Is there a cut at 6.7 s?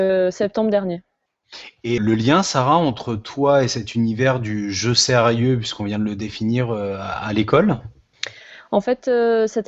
no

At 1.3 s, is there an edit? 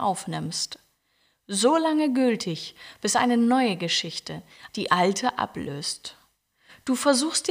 no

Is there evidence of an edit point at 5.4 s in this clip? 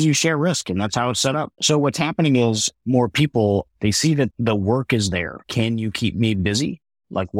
yes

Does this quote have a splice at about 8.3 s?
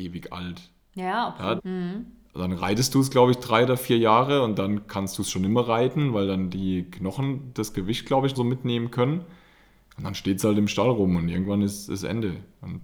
yes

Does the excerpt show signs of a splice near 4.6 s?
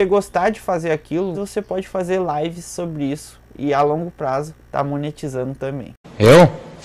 yes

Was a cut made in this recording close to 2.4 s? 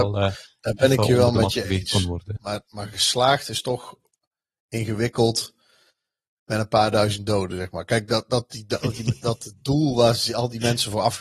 no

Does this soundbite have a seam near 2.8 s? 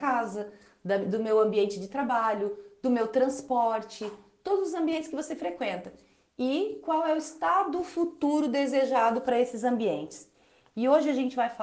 no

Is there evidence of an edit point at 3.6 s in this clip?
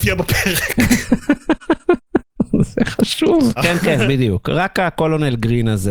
yes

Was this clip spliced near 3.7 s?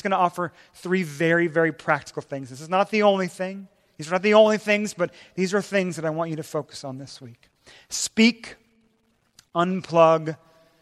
no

